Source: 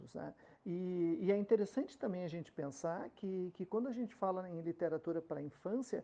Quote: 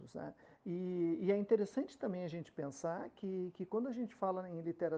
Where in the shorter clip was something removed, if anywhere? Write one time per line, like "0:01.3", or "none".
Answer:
none